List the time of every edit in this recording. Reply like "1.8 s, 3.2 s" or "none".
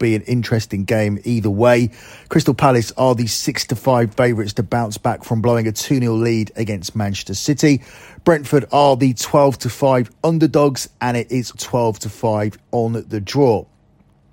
11.5 s